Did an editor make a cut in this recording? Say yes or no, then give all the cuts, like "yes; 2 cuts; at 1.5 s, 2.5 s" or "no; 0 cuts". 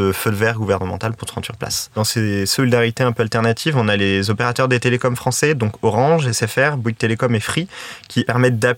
no; 0 cuts